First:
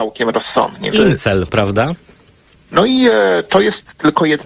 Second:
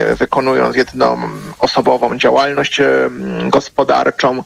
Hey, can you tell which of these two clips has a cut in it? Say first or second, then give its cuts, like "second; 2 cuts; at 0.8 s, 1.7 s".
first; 2 cuts; at 0.9 s, 2.5 s